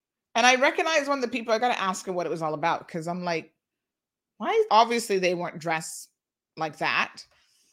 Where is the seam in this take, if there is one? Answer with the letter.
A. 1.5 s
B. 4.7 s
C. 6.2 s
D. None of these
B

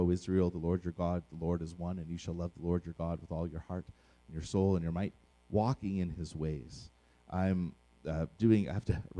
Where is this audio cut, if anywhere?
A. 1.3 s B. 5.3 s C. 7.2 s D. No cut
B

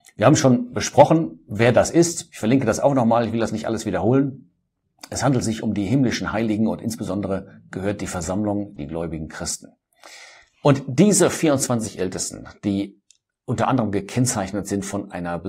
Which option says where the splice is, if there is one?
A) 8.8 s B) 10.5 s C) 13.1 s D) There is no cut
A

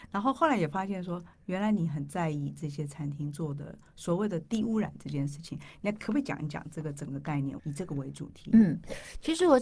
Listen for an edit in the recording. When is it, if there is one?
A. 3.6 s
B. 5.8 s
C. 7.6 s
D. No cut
C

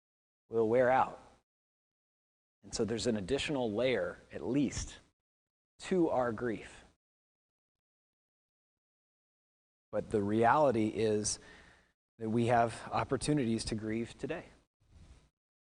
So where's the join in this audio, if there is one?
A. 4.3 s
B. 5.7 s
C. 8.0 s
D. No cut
B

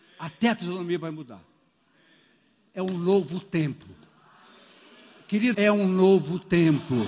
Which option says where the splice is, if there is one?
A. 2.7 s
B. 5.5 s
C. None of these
B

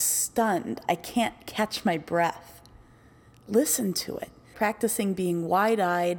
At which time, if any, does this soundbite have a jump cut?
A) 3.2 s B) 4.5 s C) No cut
B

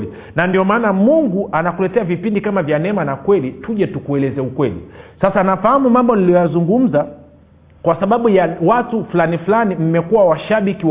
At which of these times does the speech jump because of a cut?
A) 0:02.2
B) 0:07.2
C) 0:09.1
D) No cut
D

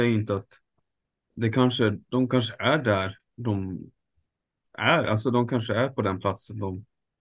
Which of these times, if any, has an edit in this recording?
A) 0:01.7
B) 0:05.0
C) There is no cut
C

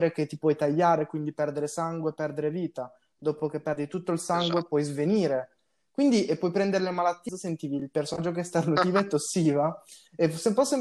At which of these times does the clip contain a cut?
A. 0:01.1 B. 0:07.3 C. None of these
B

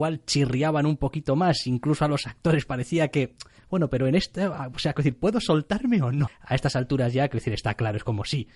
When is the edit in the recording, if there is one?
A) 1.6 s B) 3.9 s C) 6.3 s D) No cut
C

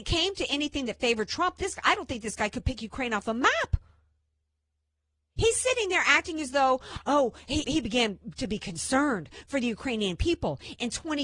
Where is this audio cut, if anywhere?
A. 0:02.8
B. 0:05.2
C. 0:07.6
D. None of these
C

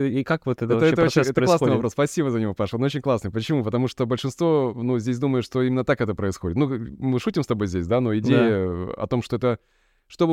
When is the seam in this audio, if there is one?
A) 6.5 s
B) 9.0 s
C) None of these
C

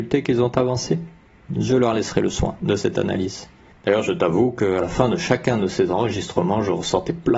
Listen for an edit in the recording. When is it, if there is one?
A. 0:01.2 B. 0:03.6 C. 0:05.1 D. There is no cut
D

